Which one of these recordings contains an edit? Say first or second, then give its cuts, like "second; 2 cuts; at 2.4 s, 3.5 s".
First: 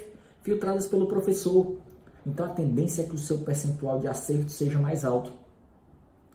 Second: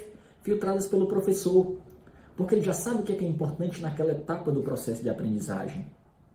first; 1 cut; at 2.2 s